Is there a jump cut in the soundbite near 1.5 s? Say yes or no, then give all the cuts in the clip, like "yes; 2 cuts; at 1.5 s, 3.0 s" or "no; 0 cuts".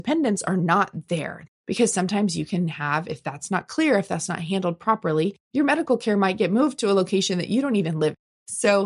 yes; 1 cut; at 1.5 s